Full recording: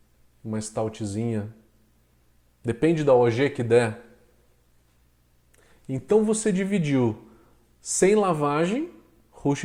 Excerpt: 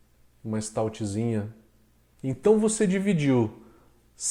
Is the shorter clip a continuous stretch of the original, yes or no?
no